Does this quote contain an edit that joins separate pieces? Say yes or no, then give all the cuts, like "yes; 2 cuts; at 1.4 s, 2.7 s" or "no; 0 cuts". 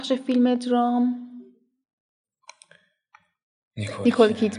no; 0 cuts